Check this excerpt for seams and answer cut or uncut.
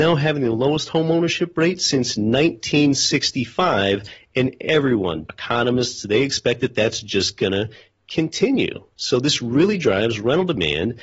cut